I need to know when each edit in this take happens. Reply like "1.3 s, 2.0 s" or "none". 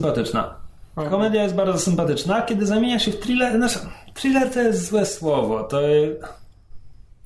none